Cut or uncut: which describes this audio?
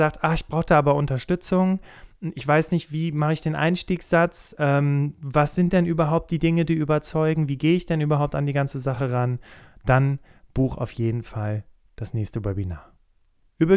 uncut